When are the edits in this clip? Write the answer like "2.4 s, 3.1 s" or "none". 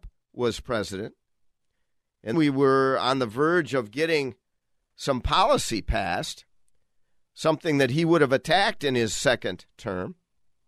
2.3 s